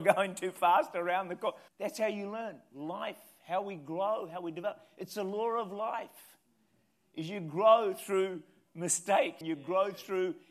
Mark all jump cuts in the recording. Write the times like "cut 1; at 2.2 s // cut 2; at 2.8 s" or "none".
cut 1; at 1.7 s // cut 2; at 9.4 s